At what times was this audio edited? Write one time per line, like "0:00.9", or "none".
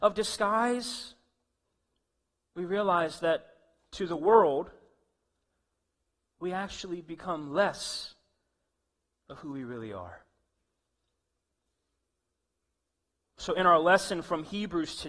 none